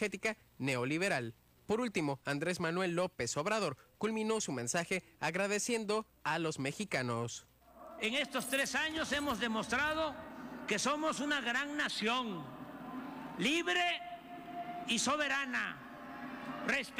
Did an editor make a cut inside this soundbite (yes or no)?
yes